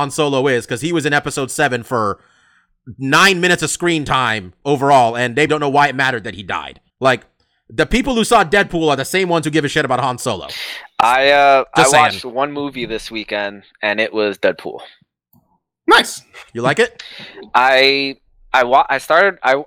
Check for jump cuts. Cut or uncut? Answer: cut